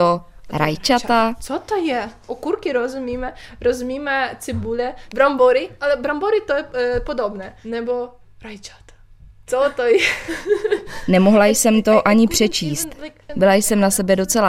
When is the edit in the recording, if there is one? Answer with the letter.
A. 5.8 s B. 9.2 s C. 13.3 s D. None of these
C